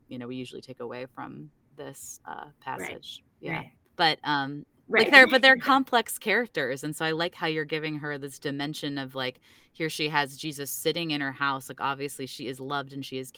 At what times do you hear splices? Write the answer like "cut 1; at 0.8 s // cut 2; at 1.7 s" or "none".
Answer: cut 1; at 3.9 s

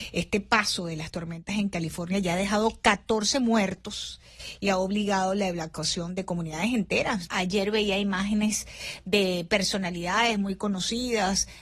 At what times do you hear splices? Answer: cut 1; at 7.3 s

